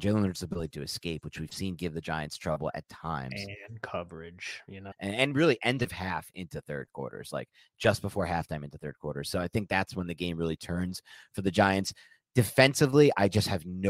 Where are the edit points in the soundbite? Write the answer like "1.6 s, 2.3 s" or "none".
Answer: 4.9 s